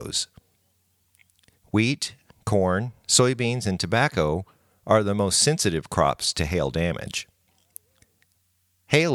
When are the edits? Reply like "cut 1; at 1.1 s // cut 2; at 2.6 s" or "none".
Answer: none